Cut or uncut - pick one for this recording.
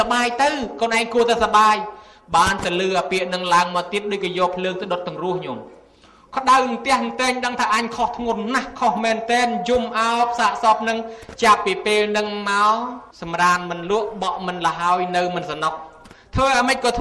cut